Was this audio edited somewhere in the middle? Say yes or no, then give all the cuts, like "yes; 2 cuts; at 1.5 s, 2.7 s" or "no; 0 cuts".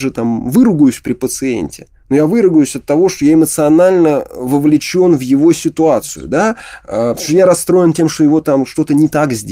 no; 0 cuts